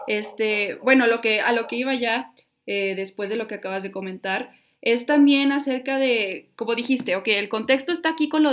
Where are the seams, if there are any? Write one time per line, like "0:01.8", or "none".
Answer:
none

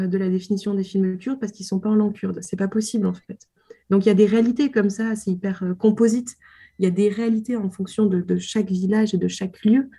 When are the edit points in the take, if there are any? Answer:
none

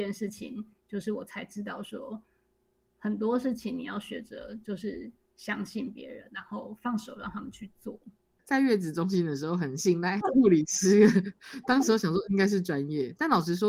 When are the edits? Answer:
none

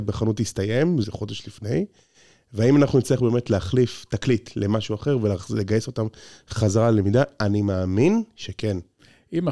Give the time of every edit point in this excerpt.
0:01.0

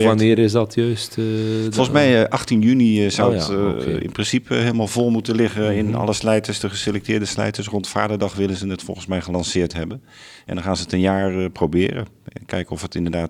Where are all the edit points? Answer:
none

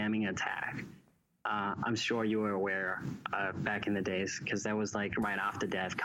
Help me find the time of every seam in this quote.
none

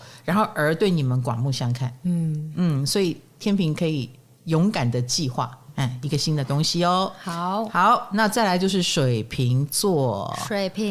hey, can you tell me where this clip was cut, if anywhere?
none

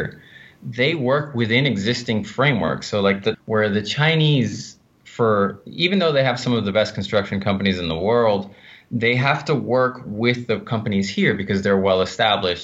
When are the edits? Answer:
0:03.3

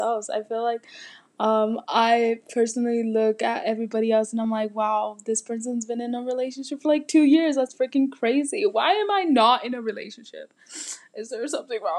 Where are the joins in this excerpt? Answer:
none

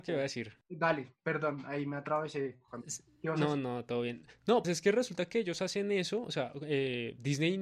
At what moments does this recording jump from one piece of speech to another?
0:04.6

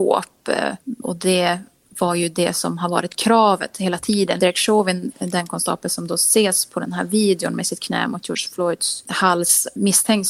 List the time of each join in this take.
0:01.0
0:04.4

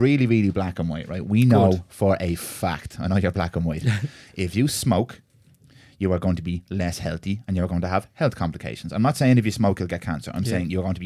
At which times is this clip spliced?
none

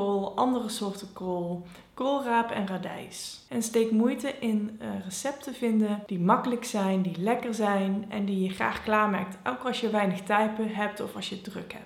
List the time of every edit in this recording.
0:03.5

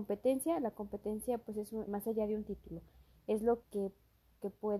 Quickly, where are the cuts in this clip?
0:01.9
0:03.6

